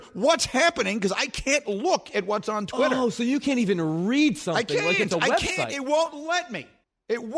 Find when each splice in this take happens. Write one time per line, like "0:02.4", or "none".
none